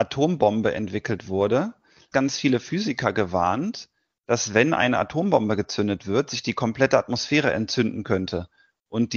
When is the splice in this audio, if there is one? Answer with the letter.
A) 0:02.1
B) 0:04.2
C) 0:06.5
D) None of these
A